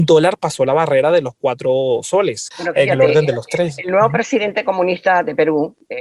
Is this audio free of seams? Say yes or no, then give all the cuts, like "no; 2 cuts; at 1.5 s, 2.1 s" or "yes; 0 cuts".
no; 1 cut; at 2.5 s